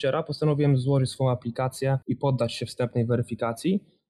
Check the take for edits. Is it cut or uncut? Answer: cut